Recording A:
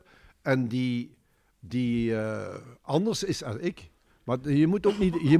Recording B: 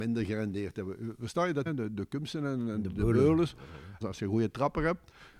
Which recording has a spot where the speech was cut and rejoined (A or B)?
B